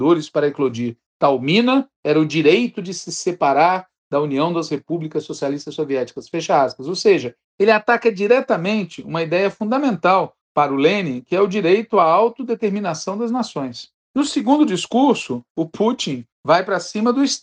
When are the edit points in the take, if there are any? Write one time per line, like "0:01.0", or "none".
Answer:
none